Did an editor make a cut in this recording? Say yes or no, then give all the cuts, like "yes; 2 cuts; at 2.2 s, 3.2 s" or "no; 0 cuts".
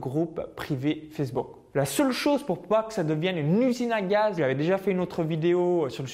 yes; 2 cuts; at 1.7 s, 4.4 s